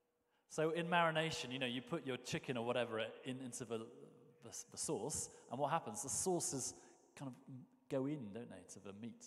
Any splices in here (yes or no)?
no